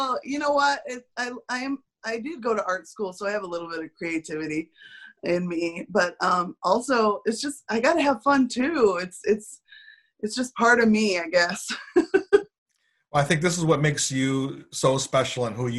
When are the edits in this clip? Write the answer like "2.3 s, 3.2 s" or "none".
none